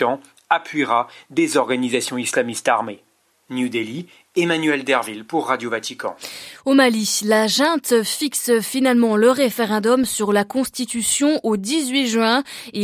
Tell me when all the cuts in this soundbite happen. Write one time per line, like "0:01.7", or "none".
none